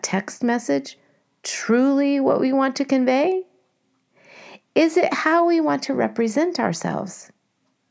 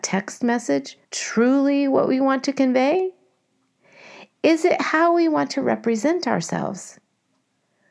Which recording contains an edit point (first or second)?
second